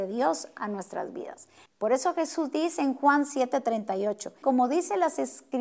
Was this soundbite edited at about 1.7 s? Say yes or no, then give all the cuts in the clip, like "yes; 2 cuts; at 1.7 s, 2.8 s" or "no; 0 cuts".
yes; 2 cuts; at 1.7 s, 4.4 s